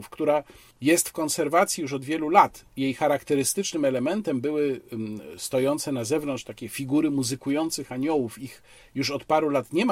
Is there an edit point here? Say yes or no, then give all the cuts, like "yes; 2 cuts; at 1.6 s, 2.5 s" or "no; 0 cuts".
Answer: no; 0 cuts